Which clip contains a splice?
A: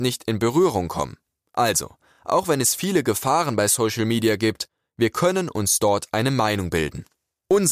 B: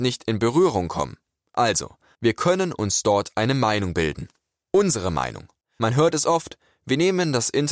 B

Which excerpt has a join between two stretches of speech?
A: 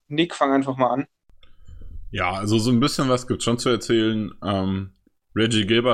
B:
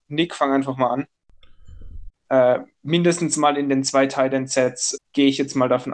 B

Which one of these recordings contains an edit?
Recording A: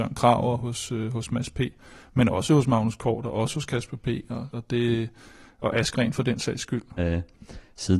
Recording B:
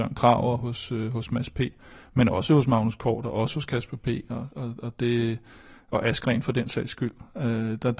A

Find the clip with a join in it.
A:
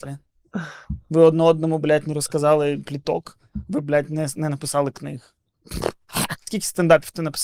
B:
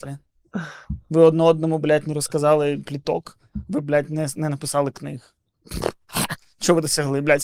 A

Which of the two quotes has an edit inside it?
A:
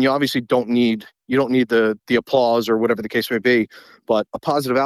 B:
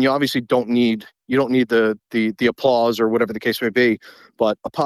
A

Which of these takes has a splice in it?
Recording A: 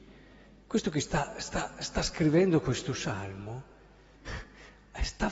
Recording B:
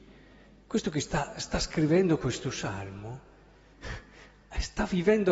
B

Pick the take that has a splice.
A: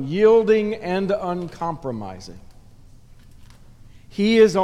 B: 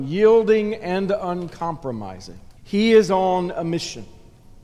B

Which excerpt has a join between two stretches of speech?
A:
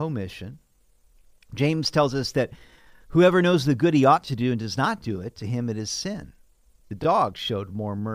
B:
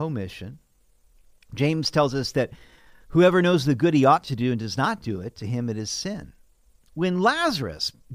A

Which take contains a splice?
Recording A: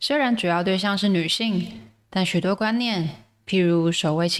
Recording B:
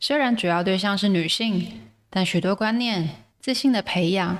B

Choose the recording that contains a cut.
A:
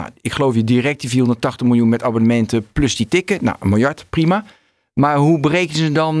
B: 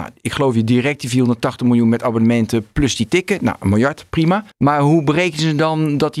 B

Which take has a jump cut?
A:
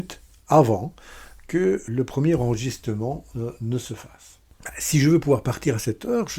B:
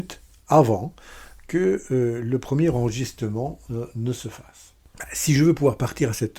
A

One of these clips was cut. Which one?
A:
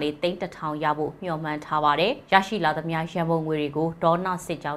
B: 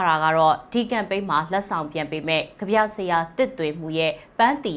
A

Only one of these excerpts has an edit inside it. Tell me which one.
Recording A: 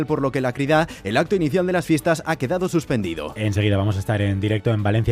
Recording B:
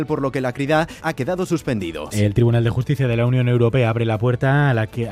B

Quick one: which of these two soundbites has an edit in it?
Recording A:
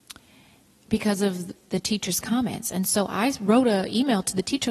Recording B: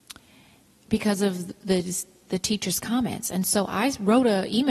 A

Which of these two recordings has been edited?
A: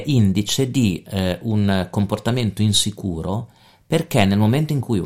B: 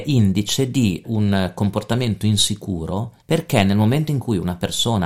B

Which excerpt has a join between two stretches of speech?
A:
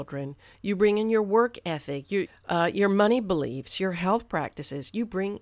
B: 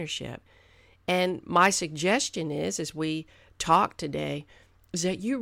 A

